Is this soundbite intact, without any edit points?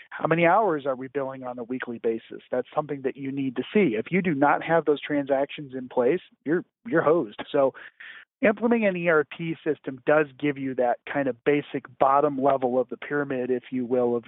no; 1 cut; at 7.4 s

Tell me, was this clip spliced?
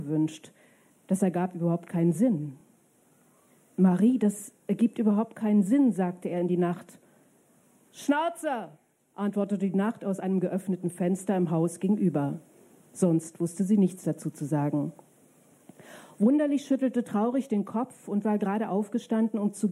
no; 0 cuts

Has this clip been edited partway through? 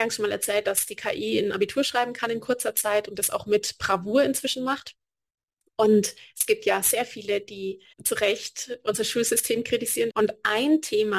yes; 2 cuts; at 7.9 s, 10.1 s

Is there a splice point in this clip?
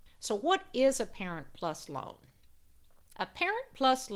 yes; 1 cut; at 3.1 s

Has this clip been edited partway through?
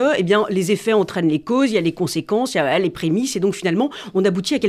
no; 0 cuts

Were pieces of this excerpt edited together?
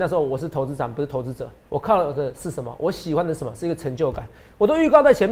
yes; 1 cut; at 1.6 s

